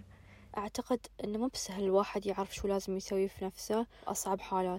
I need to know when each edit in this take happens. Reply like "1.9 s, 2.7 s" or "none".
none